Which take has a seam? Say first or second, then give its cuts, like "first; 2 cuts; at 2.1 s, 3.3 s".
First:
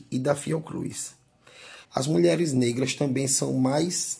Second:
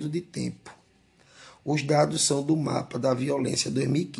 first; 1 cut; at 1.9 s